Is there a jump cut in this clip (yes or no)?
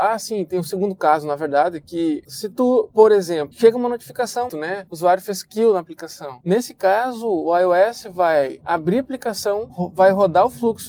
yes